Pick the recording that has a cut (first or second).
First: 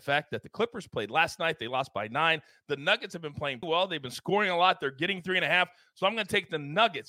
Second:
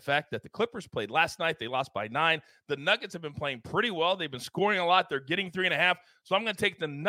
first